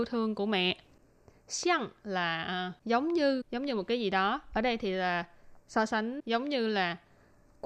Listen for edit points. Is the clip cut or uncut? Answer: uncut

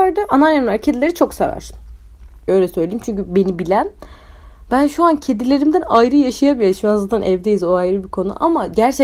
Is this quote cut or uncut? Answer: cut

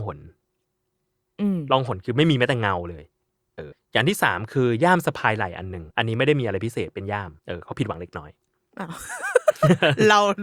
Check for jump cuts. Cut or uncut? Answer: cut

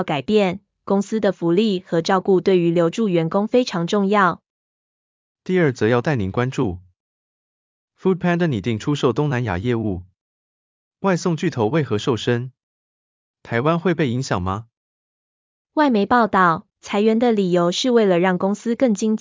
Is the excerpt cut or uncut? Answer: cut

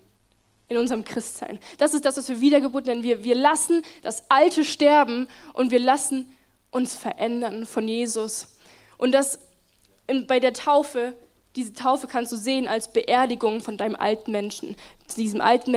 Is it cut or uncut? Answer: uncut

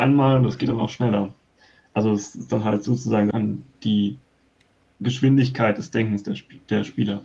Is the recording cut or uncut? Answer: cut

